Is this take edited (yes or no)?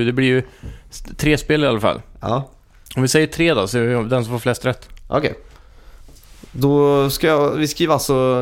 no